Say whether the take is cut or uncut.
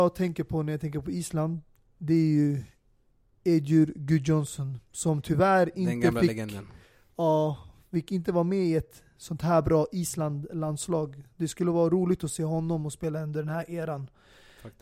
uncut